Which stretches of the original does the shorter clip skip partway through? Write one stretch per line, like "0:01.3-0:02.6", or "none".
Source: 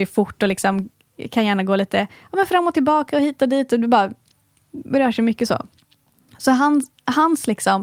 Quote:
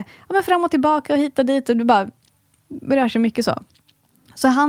none